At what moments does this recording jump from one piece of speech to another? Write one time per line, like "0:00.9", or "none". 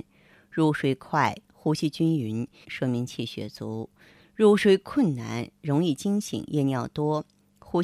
0:01.5
0:02.6